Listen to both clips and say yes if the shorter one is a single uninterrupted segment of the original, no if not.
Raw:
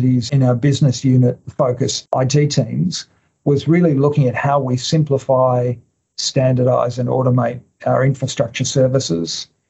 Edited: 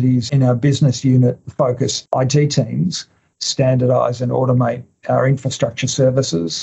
no